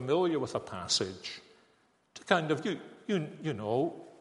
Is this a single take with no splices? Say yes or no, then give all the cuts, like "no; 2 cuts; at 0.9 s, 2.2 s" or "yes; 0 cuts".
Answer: yes; 0 cuts